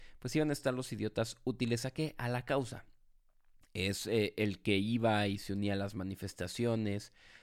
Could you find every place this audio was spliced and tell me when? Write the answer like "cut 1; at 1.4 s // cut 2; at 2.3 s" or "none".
none